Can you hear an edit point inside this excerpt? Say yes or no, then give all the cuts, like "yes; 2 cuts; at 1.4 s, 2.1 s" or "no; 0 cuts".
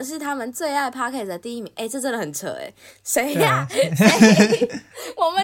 no; 0 cuts